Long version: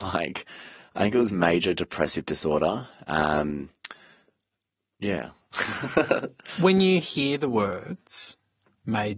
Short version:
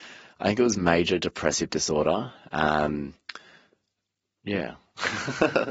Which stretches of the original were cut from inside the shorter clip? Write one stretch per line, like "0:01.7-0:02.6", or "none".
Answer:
none